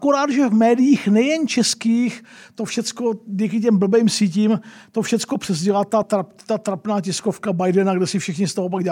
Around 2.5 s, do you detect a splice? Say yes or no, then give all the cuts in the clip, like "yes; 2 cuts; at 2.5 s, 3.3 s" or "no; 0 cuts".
no; 1 cut; at 6.0 s